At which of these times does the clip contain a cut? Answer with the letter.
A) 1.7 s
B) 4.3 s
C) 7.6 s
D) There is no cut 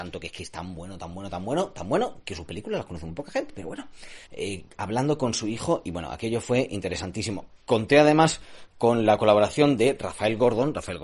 B